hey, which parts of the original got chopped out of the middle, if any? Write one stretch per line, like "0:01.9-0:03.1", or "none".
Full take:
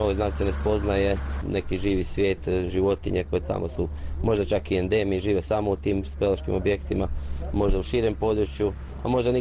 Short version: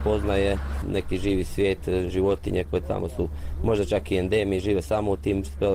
none